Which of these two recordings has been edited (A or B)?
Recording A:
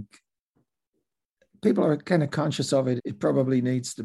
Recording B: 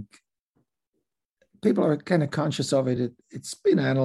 A